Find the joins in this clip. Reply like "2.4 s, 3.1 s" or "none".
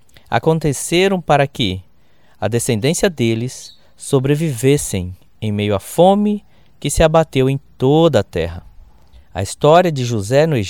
9.1 s